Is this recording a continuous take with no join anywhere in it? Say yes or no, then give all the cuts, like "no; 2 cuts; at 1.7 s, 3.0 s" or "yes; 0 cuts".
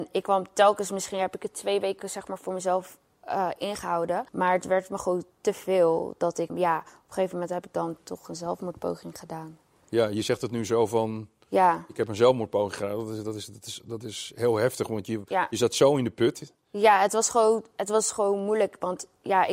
no; 2 cuts; at 4.3 s, 6.5 s